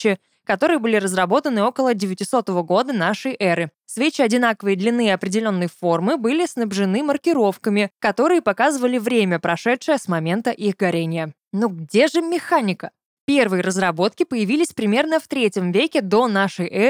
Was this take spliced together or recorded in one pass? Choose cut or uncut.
uncut